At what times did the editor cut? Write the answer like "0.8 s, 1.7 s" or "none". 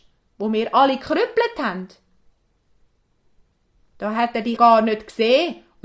4.6 s